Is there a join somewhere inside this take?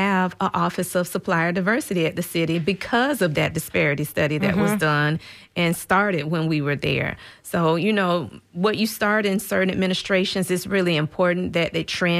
no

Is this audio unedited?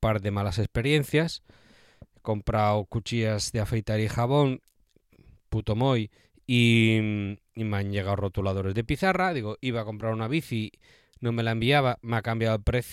yes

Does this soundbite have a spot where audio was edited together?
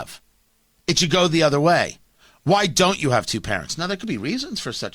no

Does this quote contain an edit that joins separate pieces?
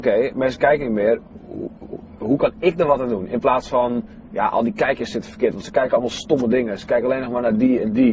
no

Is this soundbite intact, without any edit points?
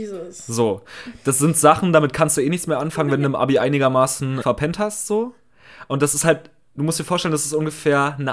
no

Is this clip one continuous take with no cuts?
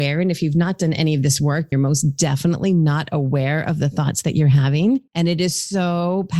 no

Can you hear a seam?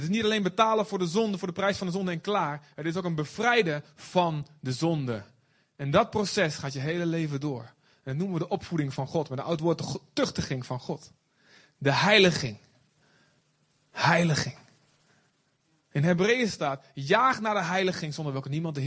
no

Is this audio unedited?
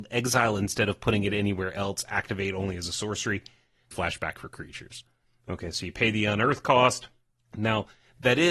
no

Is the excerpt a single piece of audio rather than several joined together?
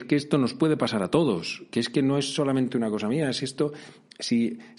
yes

